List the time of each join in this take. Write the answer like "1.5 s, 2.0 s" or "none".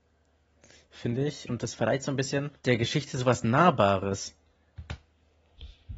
1.5 s, 2.6 s